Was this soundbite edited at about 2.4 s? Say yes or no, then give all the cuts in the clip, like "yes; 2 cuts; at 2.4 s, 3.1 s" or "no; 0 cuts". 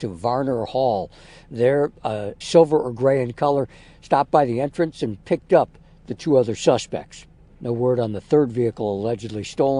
yes; 1 cut; at 2.4 s